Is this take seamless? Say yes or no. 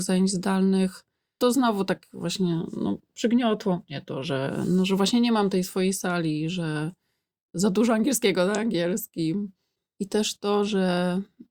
yes